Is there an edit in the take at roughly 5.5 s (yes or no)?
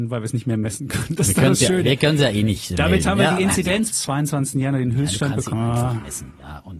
yes